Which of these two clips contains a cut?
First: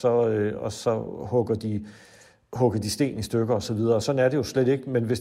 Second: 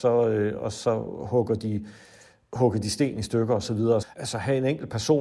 second; 1 cut; at 4.0 s

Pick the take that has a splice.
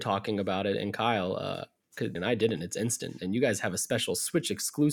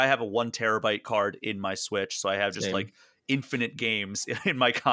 first; 1 cut; at 2.2 s

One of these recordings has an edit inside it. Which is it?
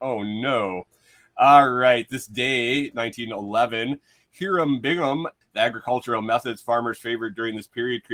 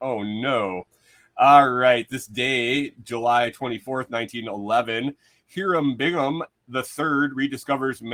first; 2 cuts; at 2.9 s, 5.4 s

